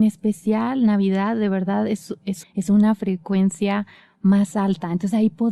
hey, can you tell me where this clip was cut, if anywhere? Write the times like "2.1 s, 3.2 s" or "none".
2.4 s